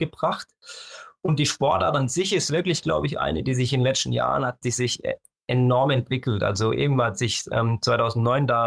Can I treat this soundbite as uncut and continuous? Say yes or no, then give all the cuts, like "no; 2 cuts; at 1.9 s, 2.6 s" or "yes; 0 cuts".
yes; 0 cuts